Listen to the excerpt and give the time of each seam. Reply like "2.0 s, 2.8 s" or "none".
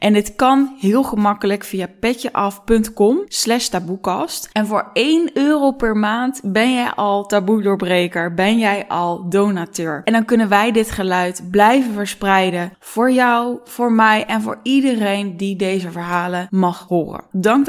10.0 s